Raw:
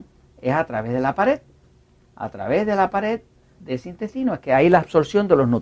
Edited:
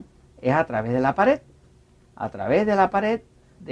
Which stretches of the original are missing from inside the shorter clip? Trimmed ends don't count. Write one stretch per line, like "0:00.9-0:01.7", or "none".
none